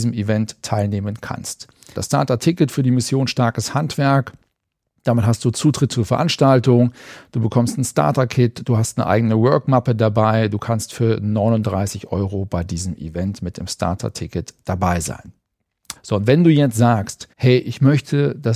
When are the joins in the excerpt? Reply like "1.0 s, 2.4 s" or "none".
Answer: 1.9 s, 16.0 s, 17.3 s

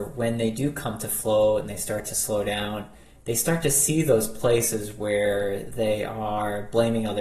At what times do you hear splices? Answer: none

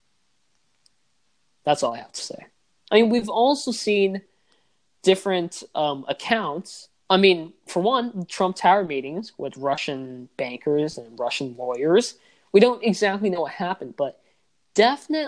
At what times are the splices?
2.9 s

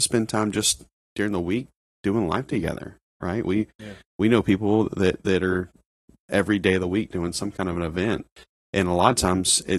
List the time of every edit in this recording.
none

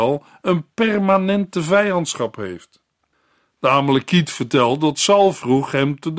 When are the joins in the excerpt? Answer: none

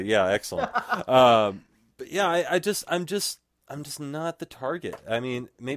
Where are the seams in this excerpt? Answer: none

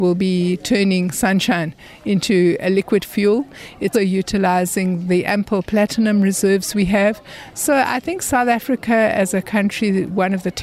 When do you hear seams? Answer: 3.9 s

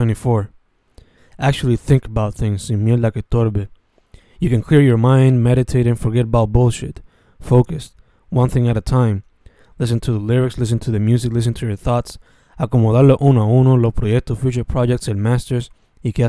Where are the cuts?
1.2 s

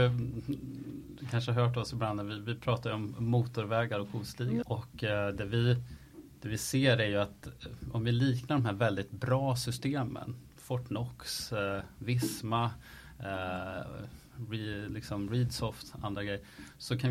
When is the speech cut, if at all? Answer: 4.6 s

